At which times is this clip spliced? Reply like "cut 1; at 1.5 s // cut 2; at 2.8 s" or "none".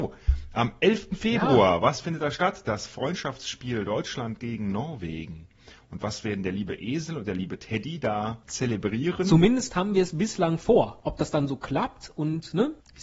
none